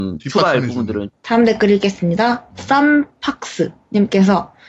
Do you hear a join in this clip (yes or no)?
yes